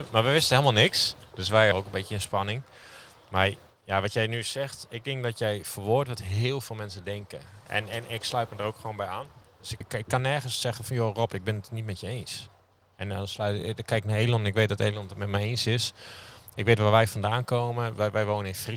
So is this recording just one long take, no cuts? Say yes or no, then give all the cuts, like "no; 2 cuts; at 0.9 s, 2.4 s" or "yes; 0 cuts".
no; 2 cuts; at 1.7 s, 9.8 s